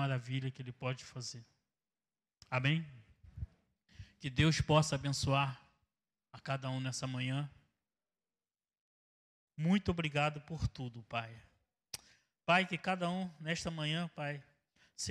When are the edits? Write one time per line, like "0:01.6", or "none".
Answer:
0:09.5